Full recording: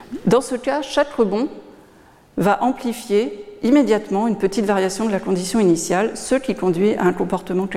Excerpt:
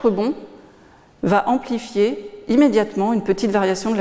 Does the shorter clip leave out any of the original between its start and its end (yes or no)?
no